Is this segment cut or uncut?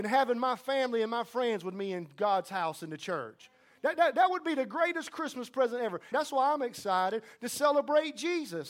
cut